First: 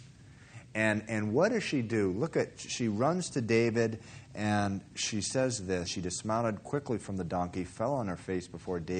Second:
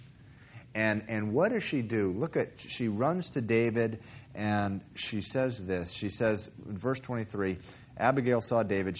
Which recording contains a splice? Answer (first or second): first